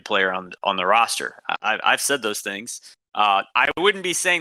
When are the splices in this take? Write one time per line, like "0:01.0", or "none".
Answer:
0:03.5